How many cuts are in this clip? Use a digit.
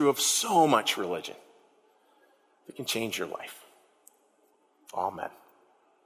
0